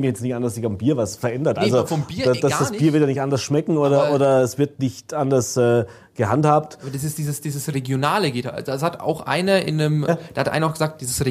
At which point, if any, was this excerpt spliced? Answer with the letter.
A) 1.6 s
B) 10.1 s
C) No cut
B